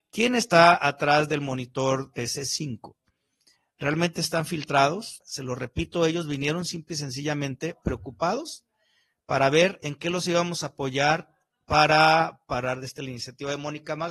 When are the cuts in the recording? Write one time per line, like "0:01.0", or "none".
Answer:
0:05.2